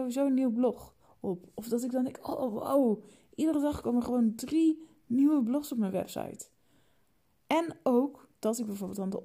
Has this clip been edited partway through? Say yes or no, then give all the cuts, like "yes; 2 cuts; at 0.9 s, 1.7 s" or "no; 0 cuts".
no; 0 cuts